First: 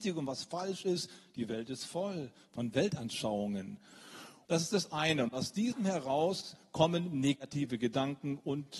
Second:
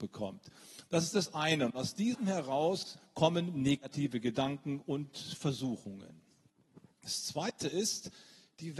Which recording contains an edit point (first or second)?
first